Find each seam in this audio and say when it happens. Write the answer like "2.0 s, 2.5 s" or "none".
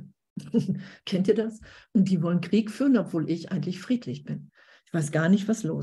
none